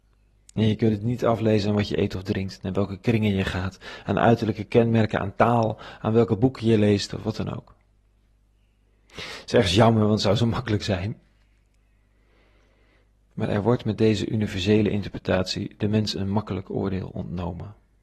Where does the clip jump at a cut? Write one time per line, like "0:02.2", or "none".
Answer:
none